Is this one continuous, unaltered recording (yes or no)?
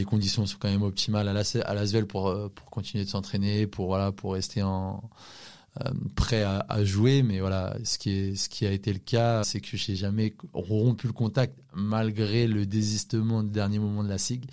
no